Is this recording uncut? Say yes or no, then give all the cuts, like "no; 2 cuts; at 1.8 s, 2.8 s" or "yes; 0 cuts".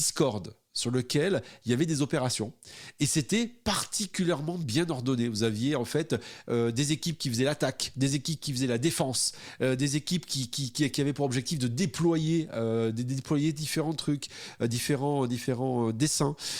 yes; 0 cuts